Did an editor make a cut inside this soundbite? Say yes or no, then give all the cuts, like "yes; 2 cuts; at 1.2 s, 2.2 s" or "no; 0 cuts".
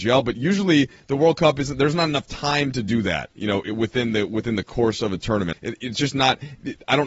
yes; 1 cut; at 5.5 s